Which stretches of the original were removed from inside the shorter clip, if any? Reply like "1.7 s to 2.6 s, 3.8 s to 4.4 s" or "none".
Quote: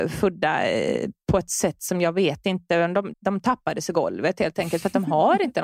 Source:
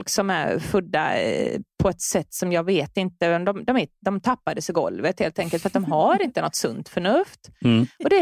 3.6 s to 3.9 s